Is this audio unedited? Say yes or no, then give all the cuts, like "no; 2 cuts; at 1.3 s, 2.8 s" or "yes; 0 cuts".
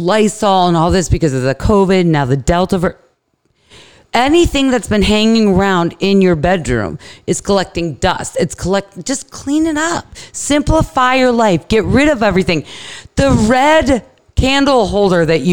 yes; 0 cuts